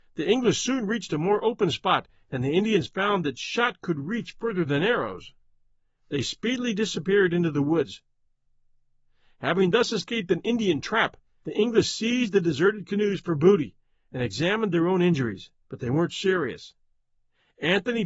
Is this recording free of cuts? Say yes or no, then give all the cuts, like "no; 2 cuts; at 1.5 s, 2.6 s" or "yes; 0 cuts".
no; 2 cuts; at 11.4 s, 15.6 s